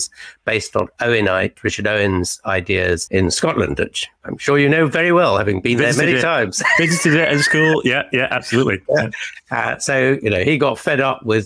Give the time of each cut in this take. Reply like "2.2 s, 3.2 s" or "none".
3.1 s